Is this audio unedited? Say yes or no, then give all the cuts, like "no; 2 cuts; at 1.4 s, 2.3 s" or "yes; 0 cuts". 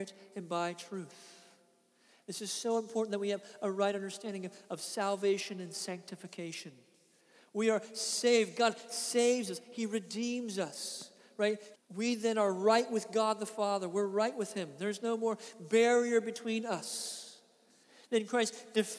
no; 1 cut; at 11.7 s